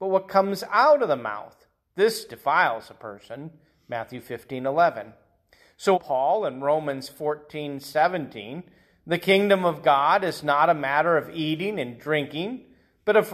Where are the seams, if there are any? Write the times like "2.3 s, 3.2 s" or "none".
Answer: 5.9 s